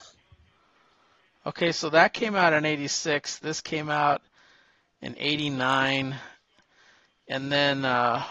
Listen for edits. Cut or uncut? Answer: uncut